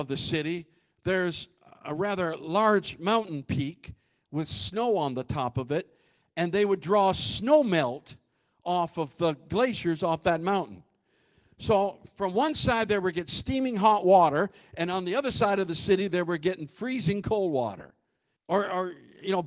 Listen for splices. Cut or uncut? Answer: cut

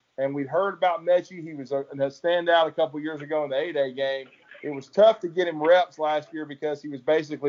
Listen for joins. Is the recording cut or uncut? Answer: uncut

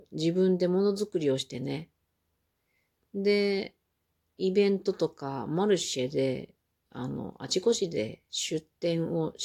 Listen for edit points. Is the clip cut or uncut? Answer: uncut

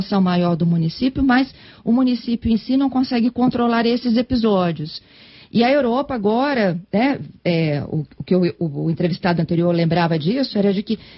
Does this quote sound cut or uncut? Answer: uncut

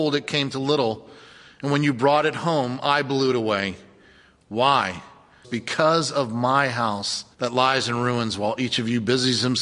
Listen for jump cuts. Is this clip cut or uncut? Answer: cut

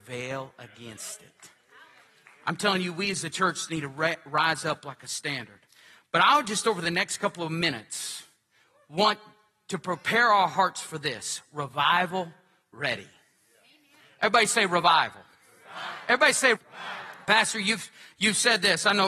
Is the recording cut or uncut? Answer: cut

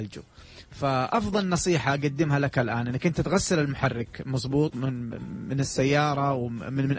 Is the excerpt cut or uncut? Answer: uncut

